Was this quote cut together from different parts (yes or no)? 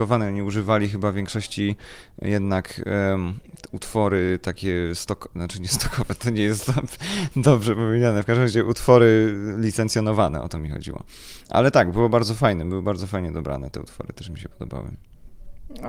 no